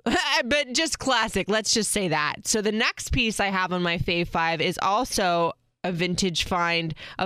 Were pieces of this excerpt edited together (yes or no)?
no